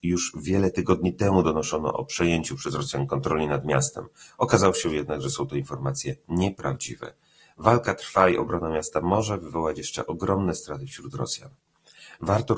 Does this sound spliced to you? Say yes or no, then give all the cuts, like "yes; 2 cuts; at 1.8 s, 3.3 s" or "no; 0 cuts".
no; 0 cuts